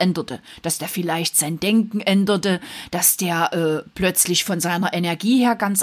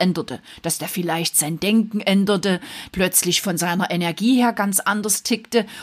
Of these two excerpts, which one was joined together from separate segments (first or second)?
second